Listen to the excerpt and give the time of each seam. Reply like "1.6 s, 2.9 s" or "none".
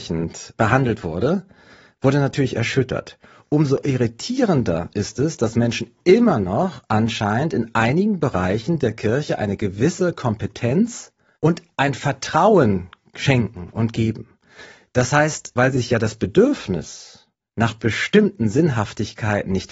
15.6 s